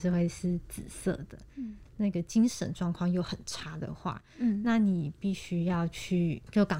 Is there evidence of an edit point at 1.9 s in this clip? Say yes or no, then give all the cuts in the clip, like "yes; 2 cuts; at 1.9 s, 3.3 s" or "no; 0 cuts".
yes; 1 cut; at 1.9 s